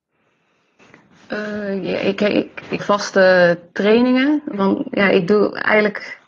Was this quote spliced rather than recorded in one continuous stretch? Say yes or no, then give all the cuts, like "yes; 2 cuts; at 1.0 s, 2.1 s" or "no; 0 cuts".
yes; 2 cuts; at 2.8 s, 4.5 s